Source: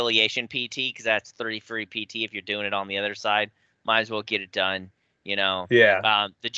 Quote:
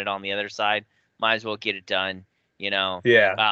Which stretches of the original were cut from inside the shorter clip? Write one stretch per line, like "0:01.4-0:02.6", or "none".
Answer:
none